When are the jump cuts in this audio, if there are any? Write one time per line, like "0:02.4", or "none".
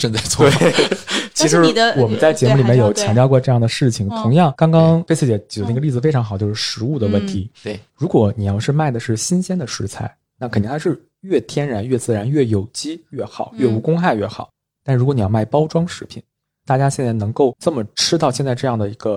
none